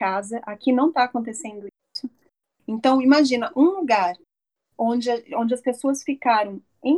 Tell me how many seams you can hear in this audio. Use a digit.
0